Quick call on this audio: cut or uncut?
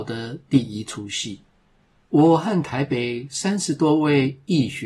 cut